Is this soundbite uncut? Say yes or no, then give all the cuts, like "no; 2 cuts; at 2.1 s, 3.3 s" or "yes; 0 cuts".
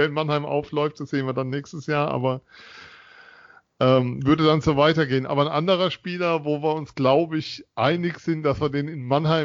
yes; 0 cuts